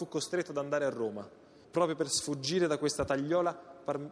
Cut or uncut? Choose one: cut